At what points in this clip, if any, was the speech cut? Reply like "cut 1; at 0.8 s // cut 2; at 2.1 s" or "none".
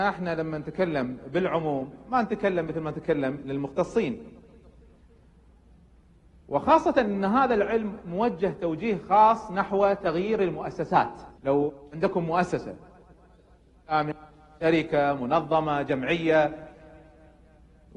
cut 1; at 11.4 s

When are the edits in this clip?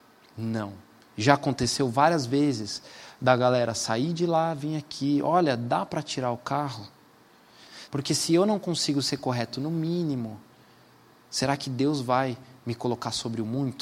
cut 1; at 7.9 s

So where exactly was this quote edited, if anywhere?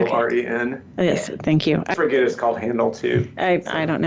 cut 1; at 1.9 s

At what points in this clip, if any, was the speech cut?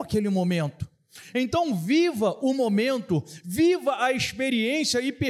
none

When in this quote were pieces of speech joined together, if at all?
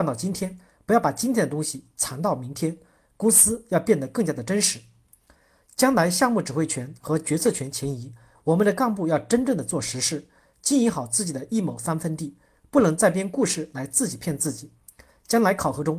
none

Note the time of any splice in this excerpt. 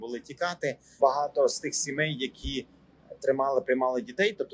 cut 1; at 1.0 s

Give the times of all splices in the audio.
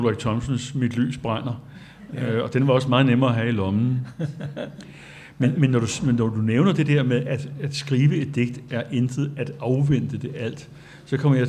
none

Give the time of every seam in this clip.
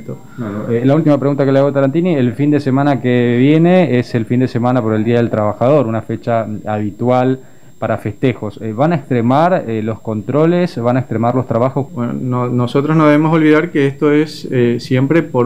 cut 1; at 11.9 s

